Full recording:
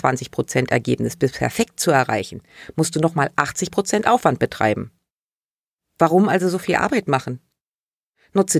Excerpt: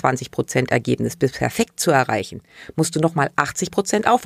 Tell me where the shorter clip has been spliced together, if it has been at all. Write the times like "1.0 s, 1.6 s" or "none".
none